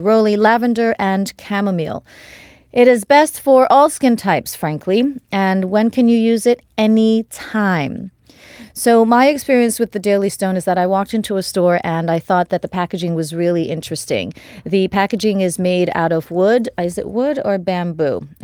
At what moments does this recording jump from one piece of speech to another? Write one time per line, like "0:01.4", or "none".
none